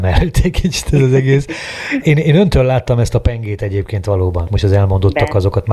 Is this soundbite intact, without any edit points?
no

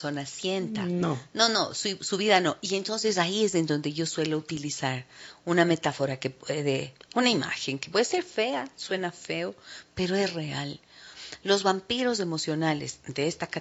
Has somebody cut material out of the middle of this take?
no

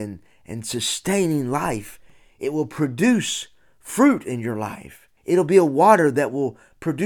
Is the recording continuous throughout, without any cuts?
no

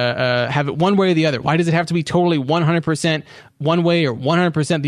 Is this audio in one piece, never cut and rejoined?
yes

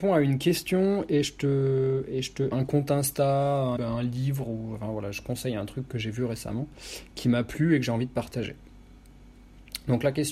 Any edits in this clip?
yes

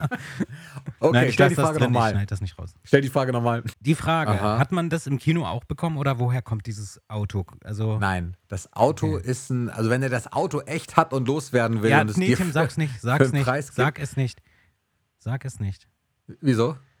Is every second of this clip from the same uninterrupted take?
no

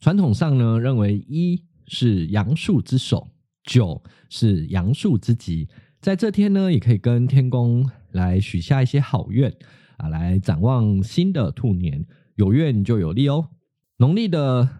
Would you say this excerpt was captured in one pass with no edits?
yes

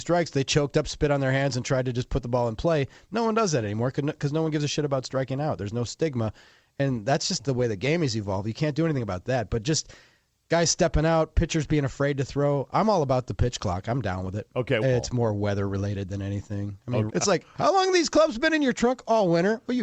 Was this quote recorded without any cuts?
no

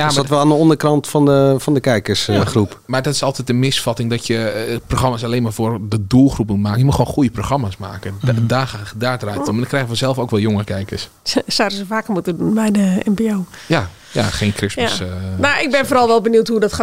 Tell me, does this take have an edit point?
no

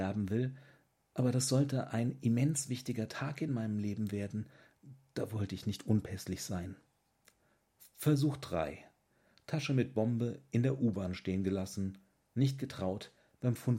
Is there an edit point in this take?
no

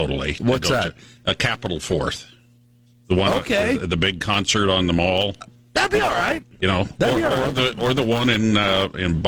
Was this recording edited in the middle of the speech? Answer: no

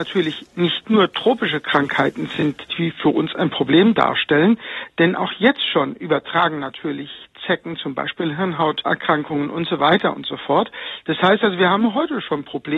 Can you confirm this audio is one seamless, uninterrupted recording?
yes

